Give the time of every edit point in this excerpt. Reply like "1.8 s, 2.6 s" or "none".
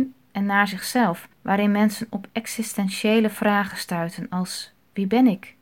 1.3 s